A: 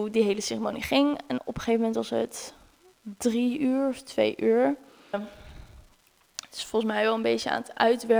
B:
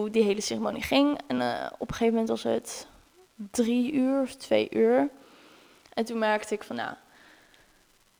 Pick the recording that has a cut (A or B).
A